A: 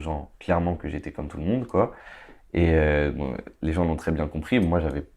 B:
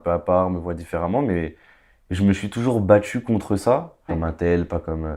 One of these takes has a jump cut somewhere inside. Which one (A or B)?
B